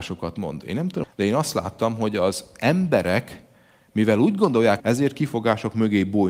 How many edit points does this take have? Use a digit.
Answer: 2